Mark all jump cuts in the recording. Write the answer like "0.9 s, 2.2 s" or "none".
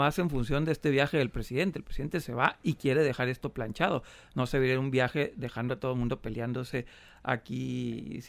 none